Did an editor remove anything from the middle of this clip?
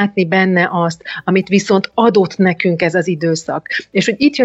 no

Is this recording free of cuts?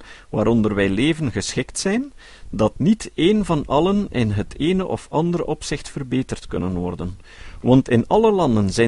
yes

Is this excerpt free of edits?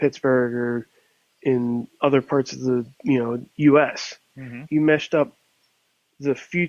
no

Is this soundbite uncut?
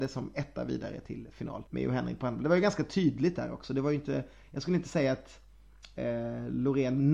no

